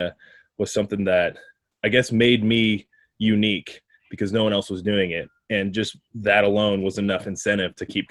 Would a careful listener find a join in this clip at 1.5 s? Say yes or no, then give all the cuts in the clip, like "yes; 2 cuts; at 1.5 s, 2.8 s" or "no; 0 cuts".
no; 0 cuts